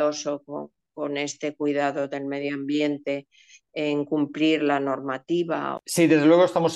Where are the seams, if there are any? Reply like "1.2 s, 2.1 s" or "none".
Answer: none